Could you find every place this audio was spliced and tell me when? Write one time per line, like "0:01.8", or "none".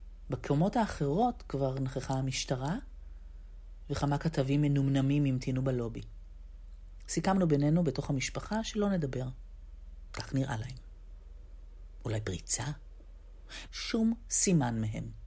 0:10.1
0:13.7